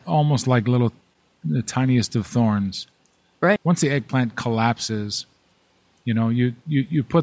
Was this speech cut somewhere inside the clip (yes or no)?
yes